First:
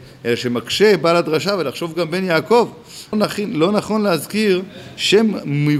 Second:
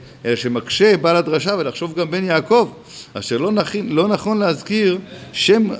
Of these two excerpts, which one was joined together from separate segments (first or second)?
first